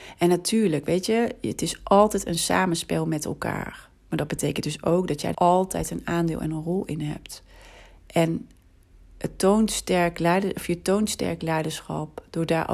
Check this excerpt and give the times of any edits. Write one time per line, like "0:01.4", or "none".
0:05.3